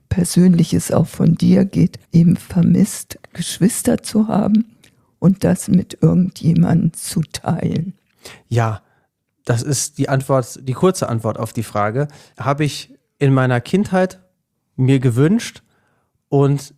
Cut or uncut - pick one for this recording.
cut